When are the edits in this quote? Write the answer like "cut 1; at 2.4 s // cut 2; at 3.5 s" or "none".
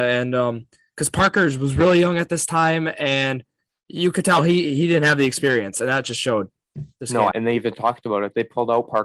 cut 1; at 7.3 s